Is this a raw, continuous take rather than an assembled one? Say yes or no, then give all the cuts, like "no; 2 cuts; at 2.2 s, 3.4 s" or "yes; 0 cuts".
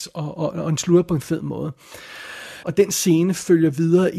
no; 1 cut; at 2.6 s